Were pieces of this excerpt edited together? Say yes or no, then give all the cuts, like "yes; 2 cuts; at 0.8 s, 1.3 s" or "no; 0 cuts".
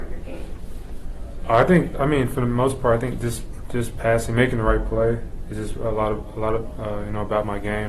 no; 0 cuts